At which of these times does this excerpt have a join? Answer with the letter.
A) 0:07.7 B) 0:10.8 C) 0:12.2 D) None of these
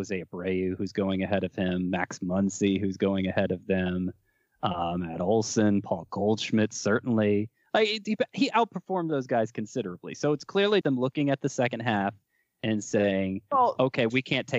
B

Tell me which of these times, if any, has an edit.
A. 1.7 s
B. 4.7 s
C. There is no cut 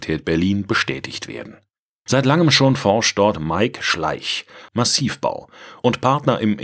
B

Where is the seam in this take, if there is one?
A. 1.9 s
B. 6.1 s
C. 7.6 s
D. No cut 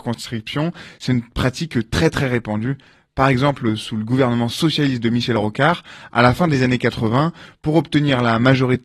D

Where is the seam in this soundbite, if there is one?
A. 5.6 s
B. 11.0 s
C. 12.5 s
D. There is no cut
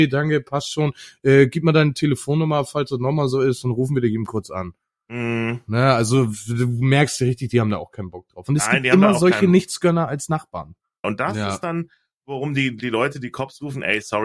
B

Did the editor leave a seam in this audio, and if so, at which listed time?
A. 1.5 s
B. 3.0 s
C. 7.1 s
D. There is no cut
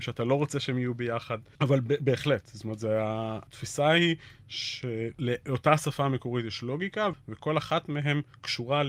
C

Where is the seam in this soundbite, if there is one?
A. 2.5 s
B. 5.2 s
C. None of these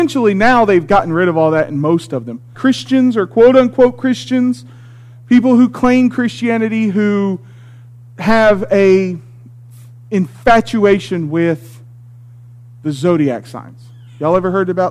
A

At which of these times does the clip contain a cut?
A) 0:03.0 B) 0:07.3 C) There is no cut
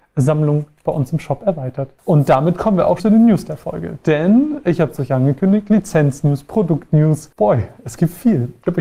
A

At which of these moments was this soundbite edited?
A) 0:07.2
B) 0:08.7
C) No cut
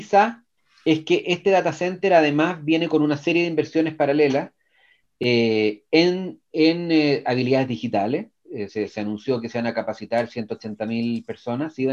B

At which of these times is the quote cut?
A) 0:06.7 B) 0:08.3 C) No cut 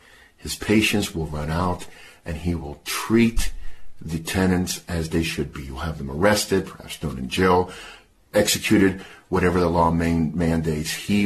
B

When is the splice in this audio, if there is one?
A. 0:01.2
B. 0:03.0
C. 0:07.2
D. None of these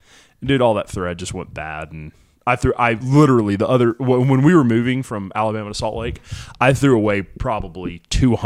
D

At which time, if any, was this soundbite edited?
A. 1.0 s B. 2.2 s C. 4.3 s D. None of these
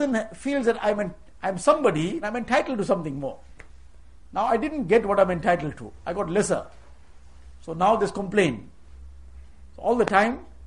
B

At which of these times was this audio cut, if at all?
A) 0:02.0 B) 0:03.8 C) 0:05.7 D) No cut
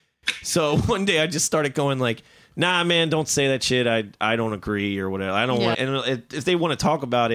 C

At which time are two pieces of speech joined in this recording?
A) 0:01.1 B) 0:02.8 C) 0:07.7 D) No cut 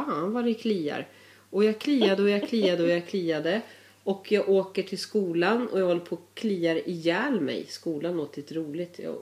D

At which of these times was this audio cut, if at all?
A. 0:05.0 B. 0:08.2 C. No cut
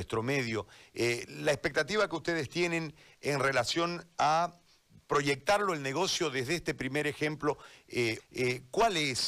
B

